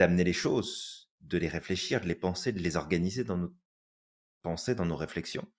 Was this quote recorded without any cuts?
yes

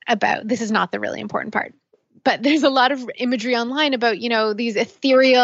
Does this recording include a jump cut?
no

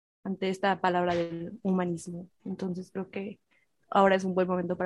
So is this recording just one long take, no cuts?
yes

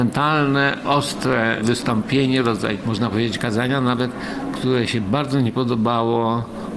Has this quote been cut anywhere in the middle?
no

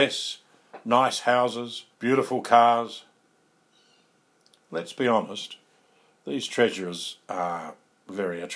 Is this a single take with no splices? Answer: no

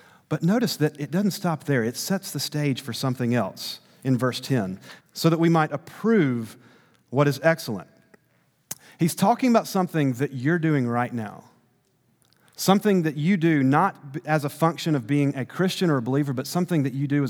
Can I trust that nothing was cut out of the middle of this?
no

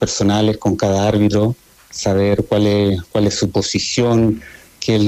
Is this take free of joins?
yes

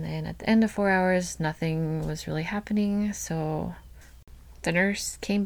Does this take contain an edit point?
no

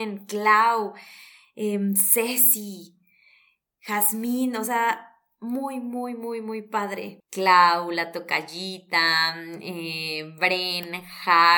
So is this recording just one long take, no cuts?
no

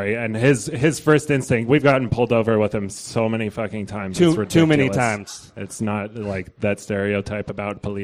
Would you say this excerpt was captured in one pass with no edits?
yes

